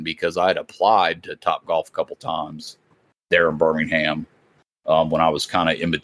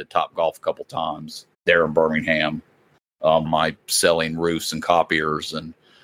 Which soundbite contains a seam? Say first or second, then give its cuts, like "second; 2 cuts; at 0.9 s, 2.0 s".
second; 2 cuts; at 1.5 s, 3.4 s